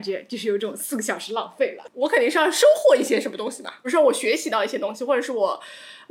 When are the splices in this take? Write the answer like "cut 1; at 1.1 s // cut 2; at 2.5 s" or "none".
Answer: cut 1; at 1.9 s